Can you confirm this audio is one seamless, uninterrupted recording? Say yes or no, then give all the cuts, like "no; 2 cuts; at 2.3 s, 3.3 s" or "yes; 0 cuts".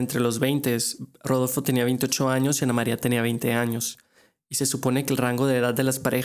yes; 0 cuts